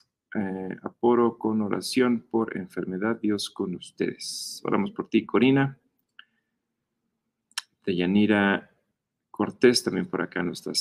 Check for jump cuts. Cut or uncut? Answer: uncut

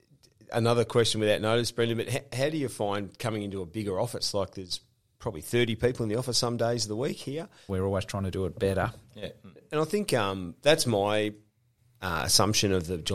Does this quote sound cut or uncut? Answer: cut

